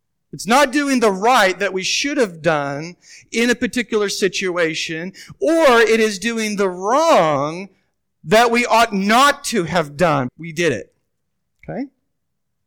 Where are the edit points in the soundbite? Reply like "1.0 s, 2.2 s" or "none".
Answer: 10.3 s